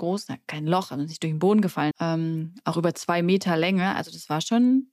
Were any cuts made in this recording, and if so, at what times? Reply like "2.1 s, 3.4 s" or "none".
1.9 s